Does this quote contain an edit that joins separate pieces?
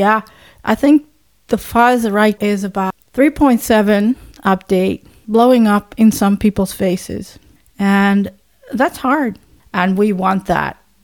yes; 2 cuts; at 2.4 s, 9.6 s

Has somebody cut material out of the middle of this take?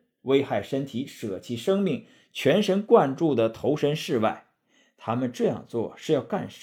no; 0 cuts

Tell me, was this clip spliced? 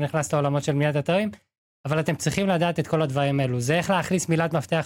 no; 0 cuts

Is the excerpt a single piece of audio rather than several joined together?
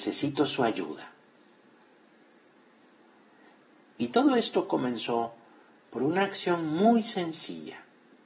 yes; 0 cuts

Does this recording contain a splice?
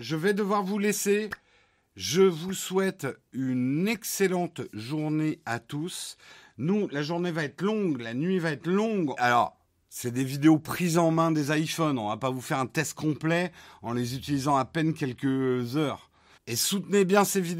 yes; 2 cuts; at 9.2 s, 16.4 s

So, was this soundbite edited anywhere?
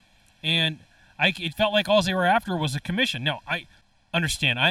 yes; 1 cut; at 1.5 s

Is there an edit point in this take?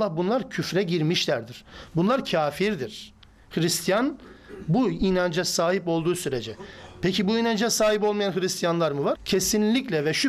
yes; 1 cut; at 9.2 s

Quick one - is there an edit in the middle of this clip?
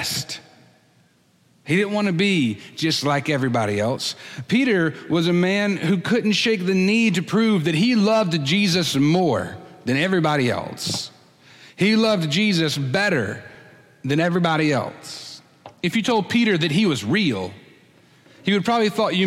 no; 0 cuts

